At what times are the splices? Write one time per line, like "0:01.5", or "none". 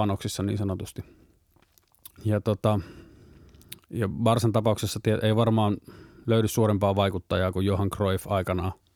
0:02.2

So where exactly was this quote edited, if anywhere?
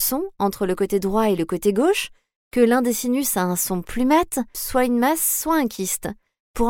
0:04.5

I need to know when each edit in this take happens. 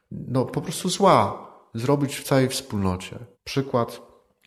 0:03.3

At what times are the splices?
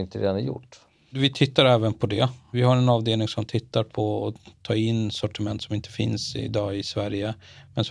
none

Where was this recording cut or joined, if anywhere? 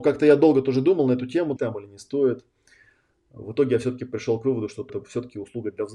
0:01.6
0:04.9

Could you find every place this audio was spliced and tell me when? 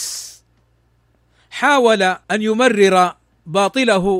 0:02.2

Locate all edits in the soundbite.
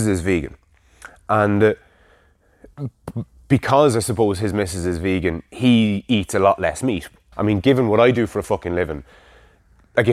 0:07.3

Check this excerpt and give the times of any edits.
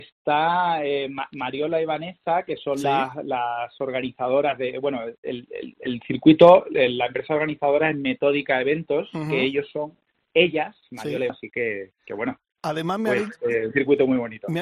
0:11.3

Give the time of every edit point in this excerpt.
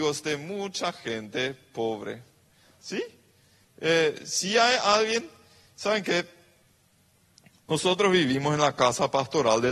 0:02.6

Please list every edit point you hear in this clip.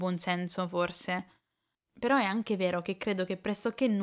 none

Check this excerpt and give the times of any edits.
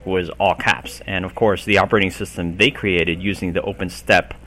none

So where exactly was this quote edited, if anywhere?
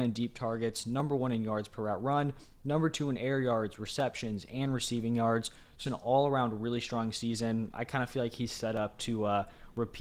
0:05.8

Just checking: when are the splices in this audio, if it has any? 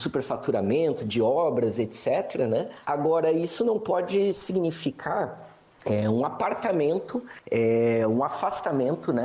none

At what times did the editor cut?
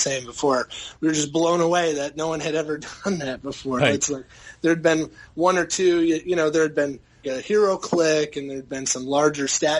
0:03.8
0:07.2

